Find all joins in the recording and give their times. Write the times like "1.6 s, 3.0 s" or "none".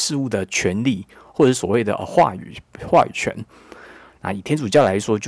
4.1 s